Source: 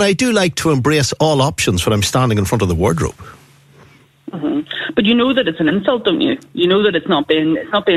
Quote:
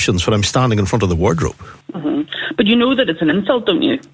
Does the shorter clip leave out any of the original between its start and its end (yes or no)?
yes